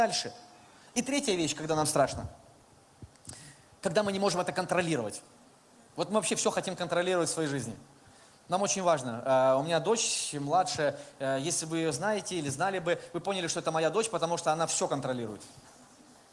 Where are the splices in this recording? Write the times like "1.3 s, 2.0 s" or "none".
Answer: none